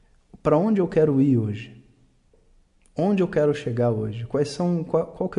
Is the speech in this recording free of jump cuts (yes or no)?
yes